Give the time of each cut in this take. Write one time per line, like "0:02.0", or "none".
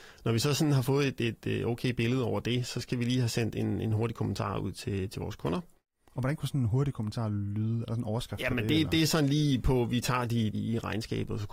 0:10.5